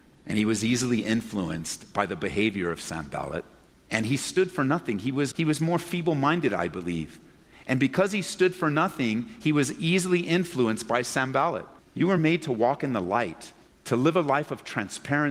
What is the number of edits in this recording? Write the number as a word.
two